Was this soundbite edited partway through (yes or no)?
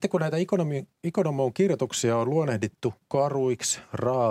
no